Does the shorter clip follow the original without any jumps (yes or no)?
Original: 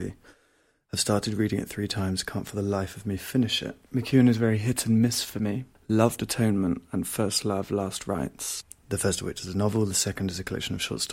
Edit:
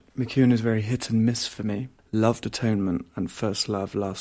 yes